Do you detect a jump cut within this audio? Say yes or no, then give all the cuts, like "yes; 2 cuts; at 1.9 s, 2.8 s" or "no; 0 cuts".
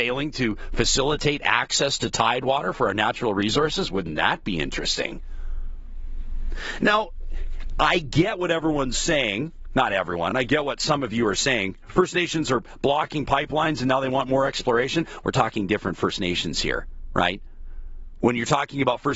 no; 0 cuts